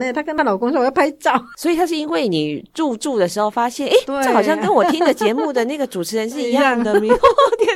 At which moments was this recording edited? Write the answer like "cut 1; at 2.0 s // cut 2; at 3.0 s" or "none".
none